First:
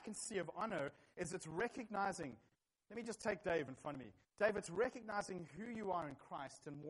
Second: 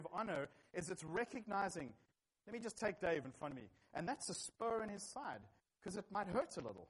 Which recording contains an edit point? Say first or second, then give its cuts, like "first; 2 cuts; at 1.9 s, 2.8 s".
second; 1 cut; at 3.8 s